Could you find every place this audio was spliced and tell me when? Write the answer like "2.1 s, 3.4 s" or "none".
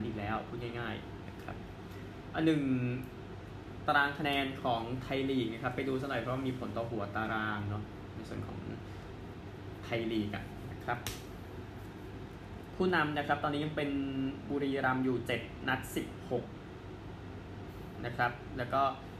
none